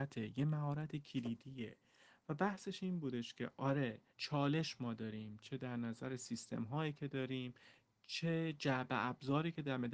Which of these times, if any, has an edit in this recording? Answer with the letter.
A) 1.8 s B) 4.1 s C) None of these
B